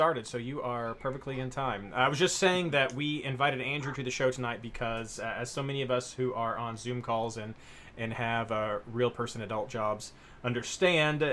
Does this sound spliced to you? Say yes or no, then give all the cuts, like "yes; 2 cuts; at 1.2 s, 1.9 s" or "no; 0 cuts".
no; 0 cuts